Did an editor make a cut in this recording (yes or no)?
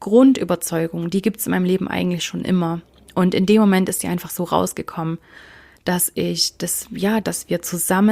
yes